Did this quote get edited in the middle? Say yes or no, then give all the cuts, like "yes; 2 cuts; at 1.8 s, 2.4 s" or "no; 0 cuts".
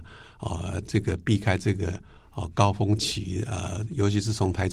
no; 0 cuts